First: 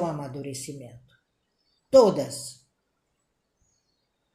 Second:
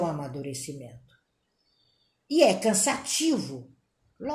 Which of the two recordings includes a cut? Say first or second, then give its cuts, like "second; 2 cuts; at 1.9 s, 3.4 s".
first; 1 cut; at 1.8 s